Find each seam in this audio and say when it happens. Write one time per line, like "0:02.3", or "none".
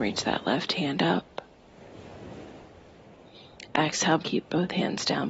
0:04.2